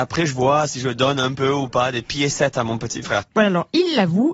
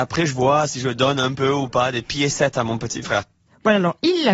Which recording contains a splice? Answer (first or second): first